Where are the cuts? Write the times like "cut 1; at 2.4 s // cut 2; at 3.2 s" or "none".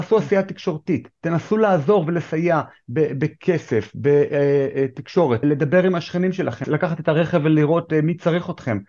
cut 1; at 5.4 s // cut 2; at 6.6 s